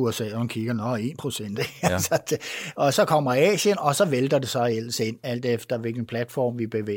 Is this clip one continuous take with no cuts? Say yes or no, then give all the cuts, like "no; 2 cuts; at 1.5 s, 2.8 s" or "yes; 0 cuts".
no; 2 cuts; at 2.9 s, 5.2 s